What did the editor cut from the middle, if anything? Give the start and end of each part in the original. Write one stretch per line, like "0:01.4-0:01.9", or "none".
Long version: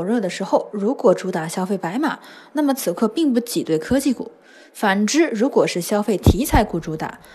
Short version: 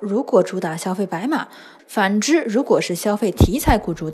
0:02.5-0:04.7